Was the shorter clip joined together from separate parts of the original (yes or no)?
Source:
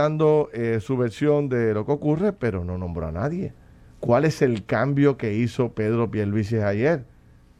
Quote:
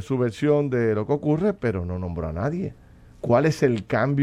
no